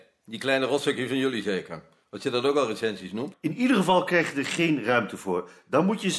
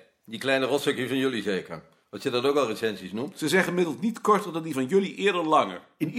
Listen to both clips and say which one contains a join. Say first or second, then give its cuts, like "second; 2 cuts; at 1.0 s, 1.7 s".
first; 1 cut; at 3.3 s